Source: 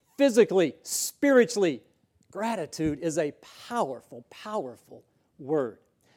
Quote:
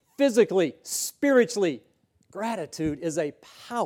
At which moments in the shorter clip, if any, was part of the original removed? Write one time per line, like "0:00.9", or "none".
none